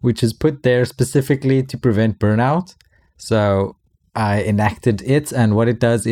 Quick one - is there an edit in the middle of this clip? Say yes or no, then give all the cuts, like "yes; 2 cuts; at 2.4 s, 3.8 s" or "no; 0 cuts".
no; 0 cuts